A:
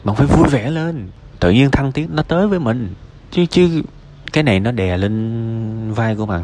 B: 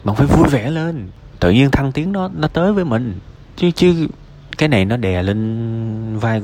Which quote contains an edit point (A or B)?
A